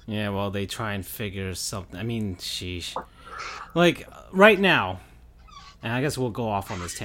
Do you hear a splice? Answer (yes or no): no